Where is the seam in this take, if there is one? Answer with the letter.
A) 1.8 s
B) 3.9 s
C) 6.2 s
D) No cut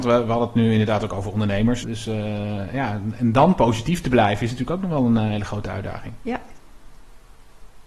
A